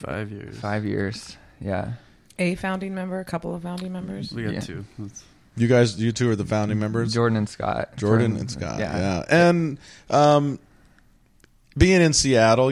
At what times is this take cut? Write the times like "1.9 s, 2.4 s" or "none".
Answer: none